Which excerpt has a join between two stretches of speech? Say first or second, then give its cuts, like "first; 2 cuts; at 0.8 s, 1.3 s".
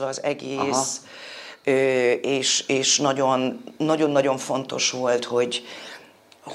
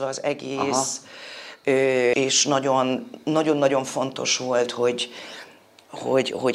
second; 1 cut; at 2.1 s